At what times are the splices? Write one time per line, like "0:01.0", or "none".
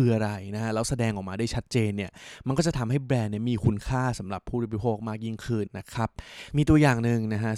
0:05.7